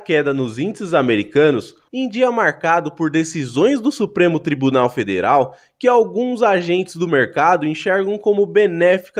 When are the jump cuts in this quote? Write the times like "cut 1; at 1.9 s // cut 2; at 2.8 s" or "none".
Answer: cut 1; at 1.9 s